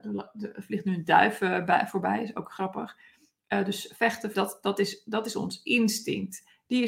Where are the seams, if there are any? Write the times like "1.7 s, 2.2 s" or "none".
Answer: 4.3 s